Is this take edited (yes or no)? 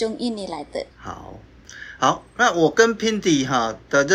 yes